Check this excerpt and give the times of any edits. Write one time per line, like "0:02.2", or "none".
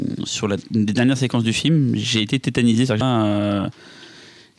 0:03.0